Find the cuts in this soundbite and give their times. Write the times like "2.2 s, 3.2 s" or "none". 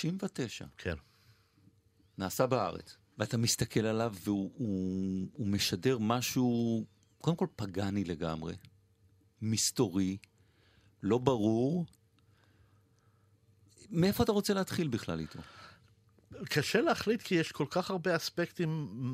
3.0 s